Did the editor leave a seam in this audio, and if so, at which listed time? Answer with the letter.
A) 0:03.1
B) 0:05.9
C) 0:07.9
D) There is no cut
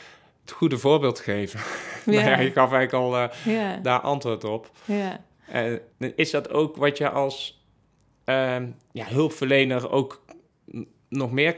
B